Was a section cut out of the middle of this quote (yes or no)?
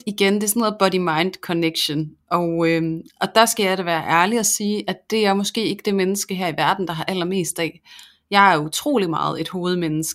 no